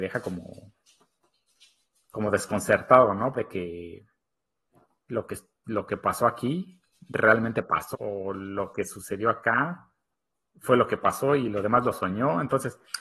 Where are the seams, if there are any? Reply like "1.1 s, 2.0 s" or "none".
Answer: 3.3 s, 7.9 s